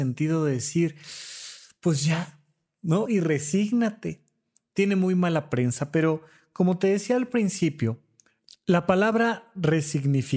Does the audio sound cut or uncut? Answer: cut